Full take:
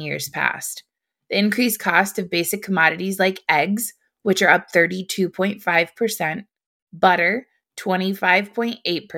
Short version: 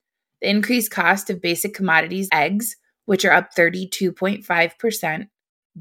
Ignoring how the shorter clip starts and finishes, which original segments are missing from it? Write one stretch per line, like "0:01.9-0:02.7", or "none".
0:03.2-0:03.5